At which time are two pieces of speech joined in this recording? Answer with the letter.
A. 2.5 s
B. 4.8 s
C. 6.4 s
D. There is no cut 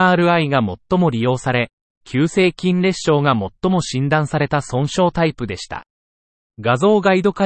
C